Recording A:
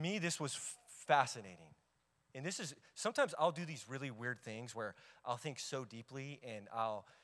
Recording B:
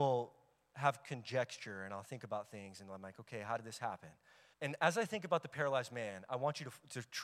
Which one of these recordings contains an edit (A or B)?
B